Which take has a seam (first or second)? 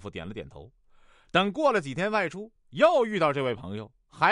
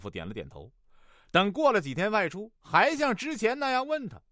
second